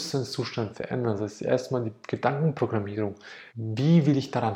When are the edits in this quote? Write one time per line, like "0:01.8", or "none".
0:03.5